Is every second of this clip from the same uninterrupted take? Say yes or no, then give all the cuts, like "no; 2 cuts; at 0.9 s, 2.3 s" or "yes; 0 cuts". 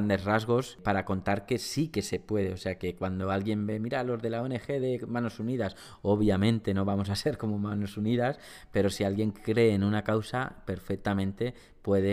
yes; 0 cuts